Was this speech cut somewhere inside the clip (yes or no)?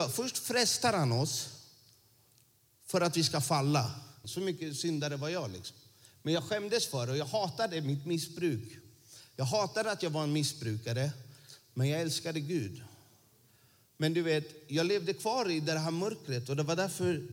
yes